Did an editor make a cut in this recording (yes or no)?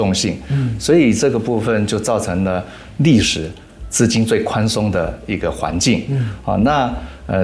no